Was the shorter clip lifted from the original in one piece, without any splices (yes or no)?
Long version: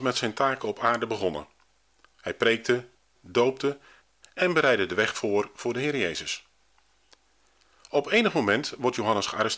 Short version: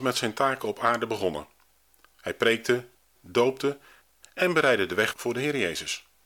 no